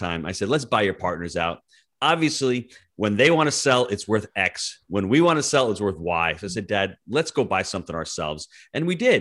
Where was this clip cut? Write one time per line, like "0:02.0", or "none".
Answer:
none